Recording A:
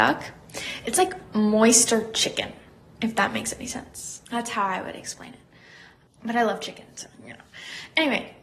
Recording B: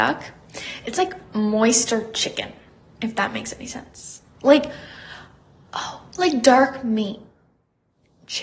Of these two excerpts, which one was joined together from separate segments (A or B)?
A